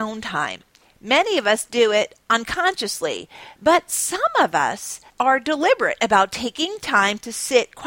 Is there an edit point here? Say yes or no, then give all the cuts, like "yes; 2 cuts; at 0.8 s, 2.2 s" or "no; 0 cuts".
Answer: yes; 2 cuts; at 3.6 s, 5.1 s